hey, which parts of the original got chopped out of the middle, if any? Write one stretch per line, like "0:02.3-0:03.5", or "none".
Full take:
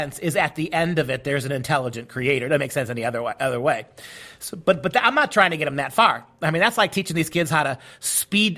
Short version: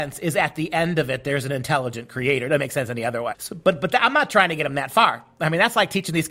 0:03.3-0:04.4